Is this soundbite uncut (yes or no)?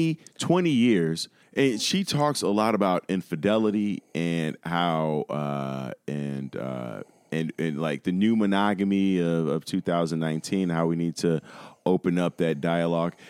no